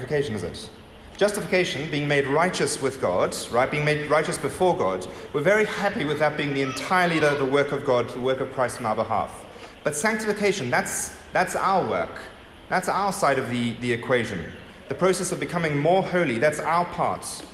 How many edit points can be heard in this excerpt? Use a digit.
0